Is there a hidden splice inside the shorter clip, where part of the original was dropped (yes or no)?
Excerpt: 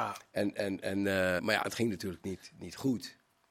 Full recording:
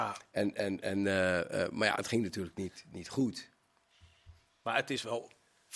yes